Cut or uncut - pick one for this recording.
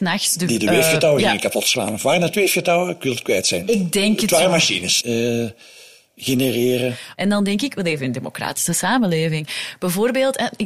cut